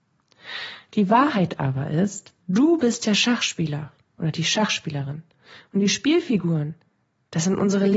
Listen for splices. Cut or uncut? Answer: cut